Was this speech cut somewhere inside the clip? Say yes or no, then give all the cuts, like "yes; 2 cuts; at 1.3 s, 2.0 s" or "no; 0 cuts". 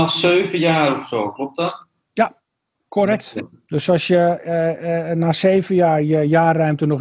no; 0 cuts